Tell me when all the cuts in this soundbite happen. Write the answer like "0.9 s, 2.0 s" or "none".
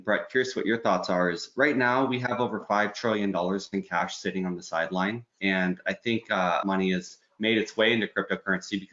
5.4 s, 6.6 s

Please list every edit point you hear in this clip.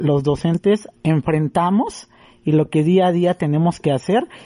1.0 s

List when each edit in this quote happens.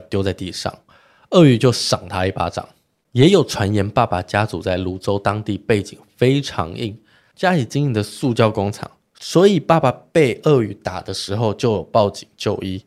none

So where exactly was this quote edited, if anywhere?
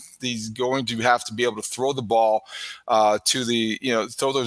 none

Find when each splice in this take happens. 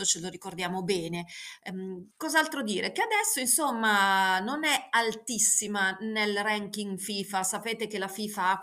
2.1 s

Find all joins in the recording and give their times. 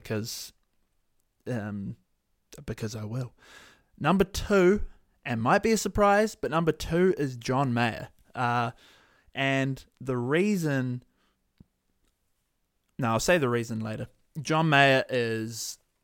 none

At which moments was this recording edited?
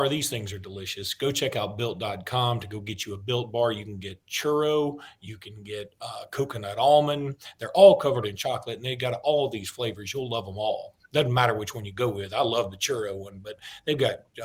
none

